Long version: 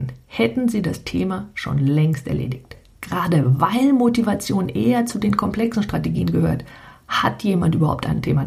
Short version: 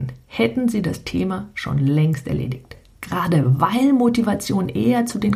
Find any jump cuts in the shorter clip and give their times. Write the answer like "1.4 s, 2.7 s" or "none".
none